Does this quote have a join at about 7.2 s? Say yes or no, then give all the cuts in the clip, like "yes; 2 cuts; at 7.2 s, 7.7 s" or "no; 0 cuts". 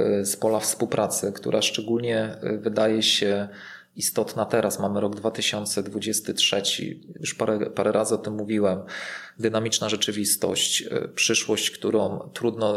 yes; 1 cut; at 7.2 s